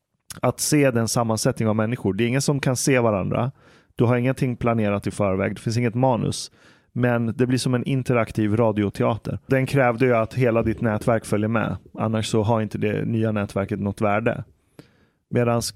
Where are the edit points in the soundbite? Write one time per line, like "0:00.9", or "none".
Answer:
0:09.5